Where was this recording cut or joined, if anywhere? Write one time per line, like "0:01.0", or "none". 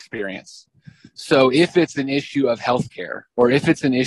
none